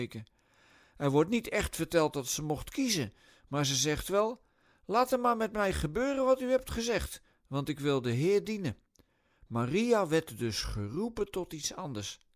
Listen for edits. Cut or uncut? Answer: uncut